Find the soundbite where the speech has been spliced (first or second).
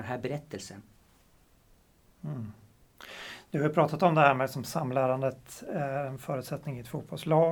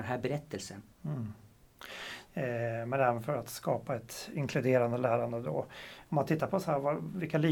second